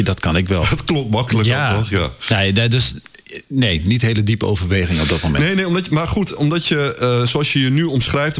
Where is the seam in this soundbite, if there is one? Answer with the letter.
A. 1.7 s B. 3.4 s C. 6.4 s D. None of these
C